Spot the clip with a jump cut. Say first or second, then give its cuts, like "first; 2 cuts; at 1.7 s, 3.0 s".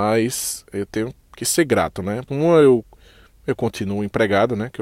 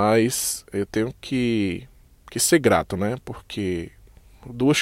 first; 2 cuts; at 1.2 s, 2.3 s